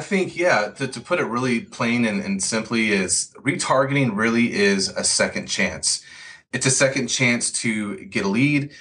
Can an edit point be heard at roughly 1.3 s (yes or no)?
no